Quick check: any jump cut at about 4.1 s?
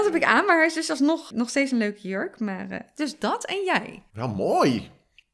yes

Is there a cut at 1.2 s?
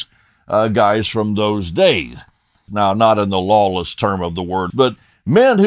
no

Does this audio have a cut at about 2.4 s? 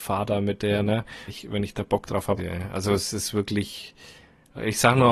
yes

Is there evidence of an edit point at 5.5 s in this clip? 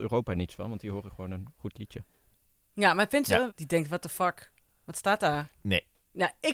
yes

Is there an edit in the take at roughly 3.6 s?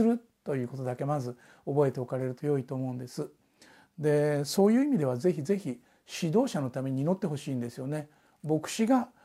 no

